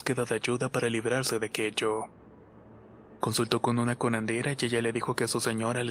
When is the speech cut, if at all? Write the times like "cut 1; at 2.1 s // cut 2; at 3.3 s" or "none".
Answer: none